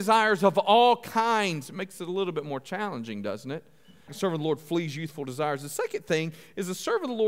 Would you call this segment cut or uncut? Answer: cut